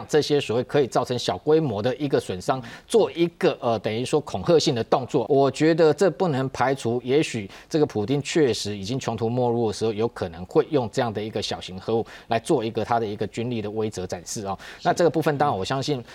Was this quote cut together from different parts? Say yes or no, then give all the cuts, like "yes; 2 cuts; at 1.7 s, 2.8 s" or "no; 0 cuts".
yes; 1 cut; at 5.3 s